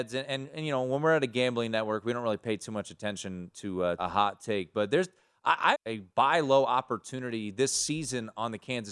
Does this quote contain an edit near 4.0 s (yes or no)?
yes